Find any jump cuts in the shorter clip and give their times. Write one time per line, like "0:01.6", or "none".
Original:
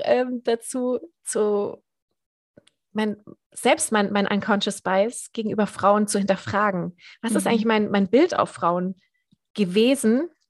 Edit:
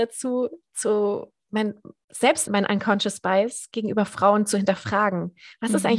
0:01.4
0:02.5